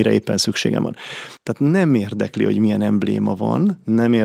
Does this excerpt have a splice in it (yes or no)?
yes